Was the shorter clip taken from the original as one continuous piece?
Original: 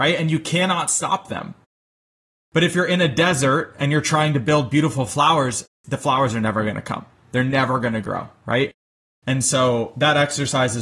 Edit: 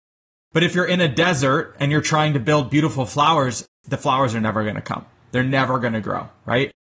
yes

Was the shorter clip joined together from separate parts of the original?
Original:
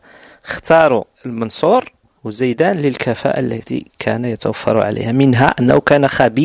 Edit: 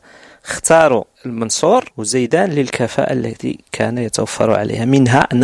yes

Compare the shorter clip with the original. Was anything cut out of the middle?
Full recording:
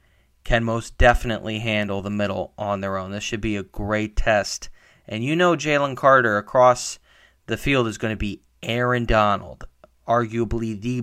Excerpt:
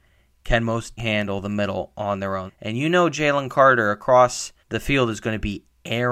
yes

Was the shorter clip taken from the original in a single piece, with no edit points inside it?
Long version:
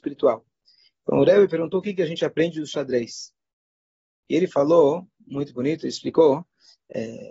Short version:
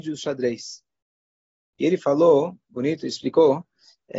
no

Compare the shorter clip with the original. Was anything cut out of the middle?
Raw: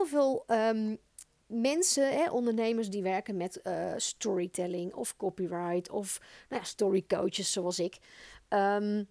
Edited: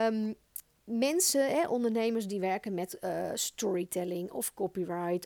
no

